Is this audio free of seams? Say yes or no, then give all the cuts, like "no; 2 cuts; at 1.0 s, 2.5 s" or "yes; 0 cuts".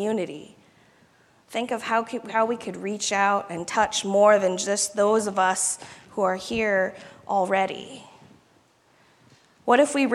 yes; 0 cuts